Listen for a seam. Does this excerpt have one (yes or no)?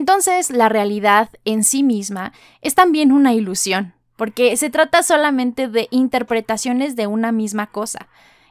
no